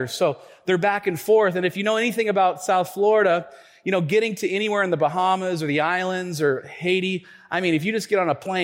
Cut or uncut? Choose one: uncut